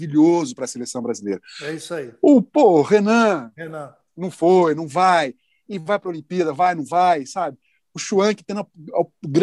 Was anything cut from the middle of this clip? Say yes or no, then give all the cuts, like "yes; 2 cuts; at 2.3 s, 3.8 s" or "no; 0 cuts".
no; 0 cuts